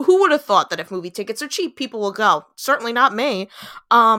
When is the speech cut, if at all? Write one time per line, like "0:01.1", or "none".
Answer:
none